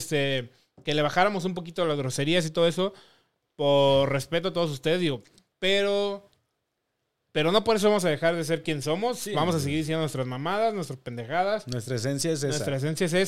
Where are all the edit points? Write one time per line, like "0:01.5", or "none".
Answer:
none